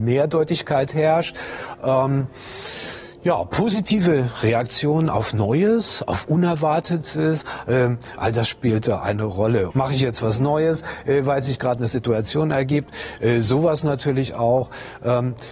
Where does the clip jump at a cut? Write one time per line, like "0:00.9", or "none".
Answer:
0:09.7